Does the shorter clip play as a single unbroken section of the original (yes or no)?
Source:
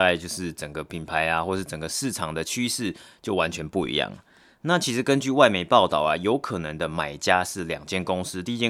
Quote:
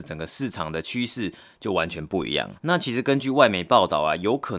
no